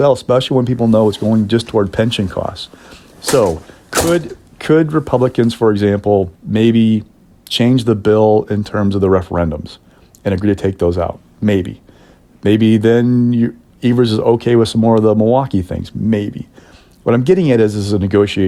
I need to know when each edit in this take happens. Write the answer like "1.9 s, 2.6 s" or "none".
6.4 s